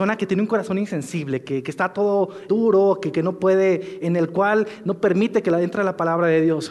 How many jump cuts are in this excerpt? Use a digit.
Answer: 2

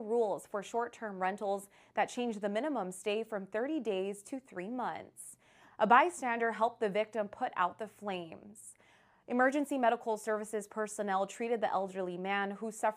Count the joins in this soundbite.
1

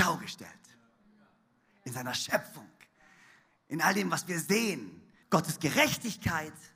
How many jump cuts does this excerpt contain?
1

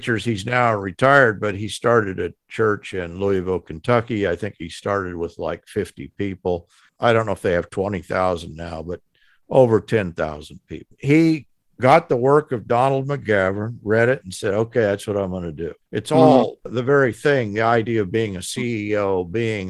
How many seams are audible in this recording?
1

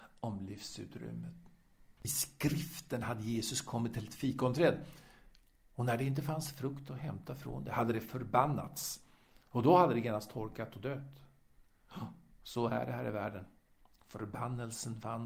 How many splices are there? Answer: 0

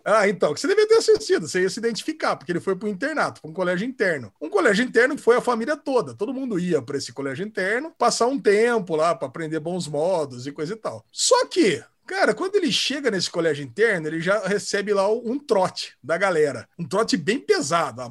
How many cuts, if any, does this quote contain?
1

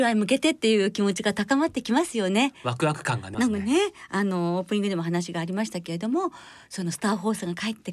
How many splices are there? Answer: 1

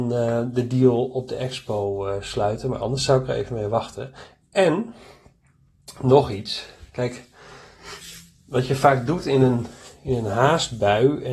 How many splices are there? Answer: 0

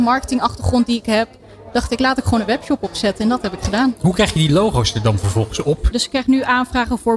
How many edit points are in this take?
1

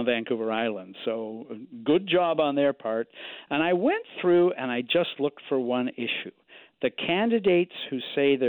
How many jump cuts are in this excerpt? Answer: 0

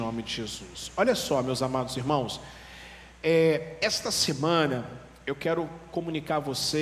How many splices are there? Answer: 0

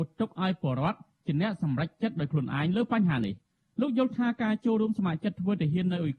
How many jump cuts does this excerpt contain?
0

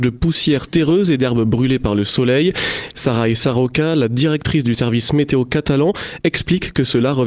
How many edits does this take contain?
1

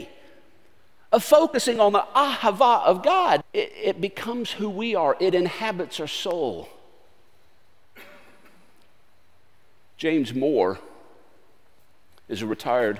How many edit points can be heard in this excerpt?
1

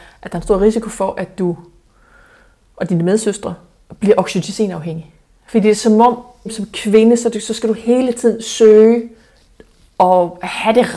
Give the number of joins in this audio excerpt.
1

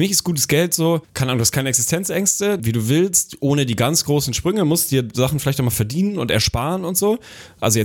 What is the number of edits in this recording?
2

